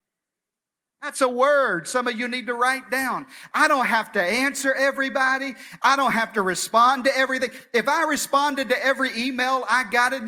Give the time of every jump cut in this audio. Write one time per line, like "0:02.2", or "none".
none